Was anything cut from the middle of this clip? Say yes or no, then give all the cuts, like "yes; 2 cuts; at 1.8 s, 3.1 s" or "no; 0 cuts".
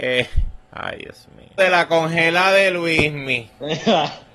yes; 1 cut; at 1.6 s